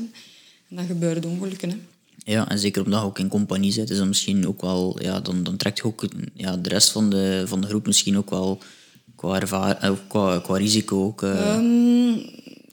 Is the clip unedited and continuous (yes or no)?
yes